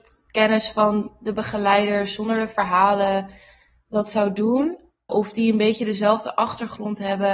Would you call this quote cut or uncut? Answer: cut